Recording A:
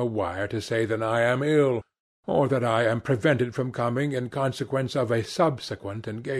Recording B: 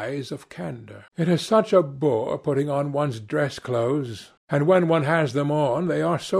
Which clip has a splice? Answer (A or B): B